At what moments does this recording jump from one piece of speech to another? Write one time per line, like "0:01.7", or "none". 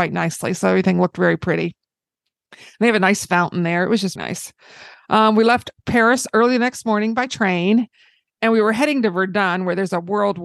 0:04.2